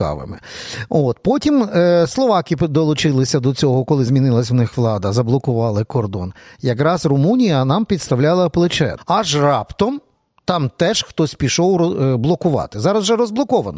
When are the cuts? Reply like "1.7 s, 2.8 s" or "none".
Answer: 9.0 s